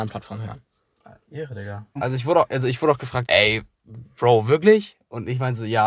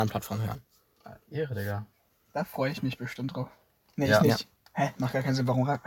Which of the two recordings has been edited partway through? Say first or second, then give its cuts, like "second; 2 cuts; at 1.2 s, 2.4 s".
first; 2 cuts; at 2.0 s, 3.3 s